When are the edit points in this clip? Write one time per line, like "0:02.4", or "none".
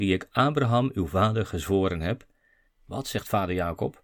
0:02.7